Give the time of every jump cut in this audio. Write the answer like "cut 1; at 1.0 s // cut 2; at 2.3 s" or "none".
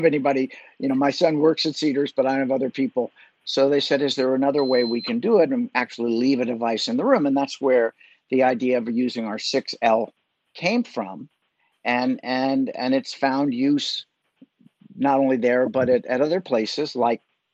cut 1; at 3.3 s